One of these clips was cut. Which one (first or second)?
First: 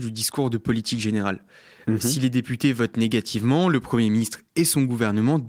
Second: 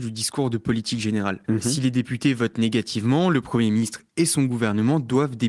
second